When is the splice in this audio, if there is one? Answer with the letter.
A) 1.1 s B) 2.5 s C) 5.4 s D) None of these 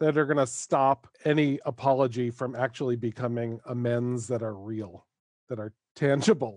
A